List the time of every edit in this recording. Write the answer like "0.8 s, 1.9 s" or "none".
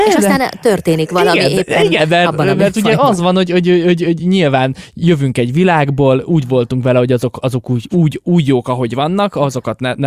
none